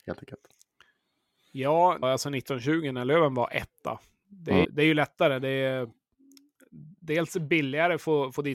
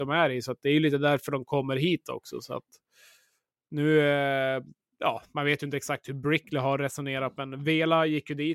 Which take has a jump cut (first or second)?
first